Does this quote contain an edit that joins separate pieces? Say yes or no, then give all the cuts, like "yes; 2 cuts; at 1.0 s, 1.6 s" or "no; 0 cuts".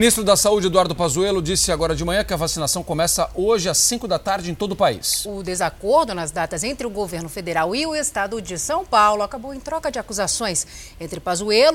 no; 0 cuts